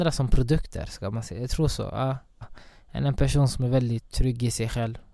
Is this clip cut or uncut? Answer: cut